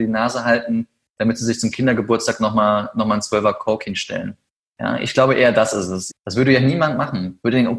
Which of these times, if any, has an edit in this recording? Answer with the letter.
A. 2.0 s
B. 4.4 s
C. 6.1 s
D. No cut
C